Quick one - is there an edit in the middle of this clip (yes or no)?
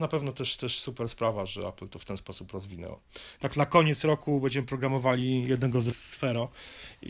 yes